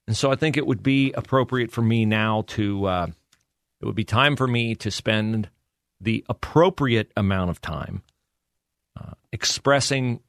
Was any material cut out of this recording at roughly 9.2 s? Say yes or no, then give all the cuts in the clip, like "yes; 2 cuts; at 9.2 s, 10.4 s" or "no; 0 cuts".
no; 1 cut; at 3.7 s